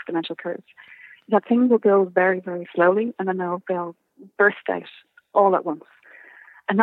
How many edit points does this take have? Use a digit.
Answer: 0